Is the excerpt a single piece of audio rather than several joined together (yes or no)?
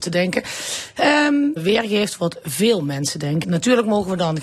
no